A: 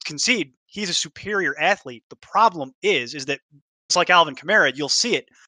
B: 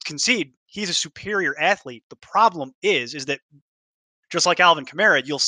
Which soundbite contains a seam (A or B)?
A